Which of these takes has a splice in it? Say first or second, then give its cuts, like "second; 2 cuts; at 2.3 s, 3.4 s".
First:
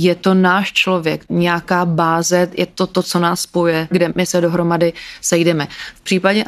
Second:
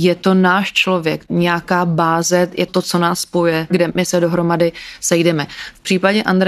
second; 1 cut; at 2.7 s